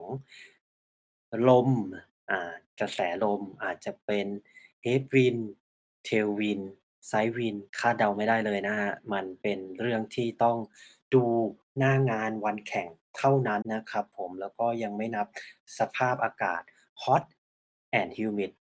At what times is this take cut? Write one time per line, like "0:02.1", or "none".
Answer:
0:07.7
0:13.6